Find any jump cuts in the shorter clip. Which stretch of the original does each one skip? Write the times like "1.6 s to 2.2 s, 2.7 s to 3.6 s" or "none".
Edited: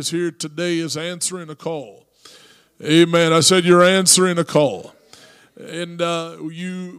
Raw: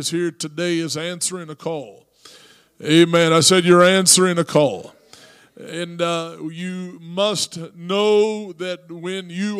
none